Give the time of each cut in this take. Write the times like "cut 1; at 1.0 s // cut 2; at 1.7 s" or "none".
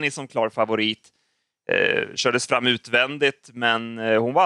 none